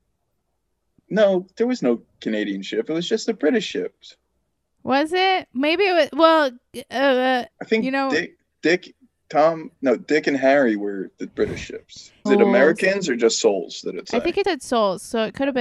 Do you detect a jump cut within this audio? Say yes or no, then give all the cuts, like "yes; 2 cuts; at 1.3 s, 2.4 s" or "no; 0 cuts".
yes; 3 cuts; at 7.5 s, 12.3 s, 14.4 s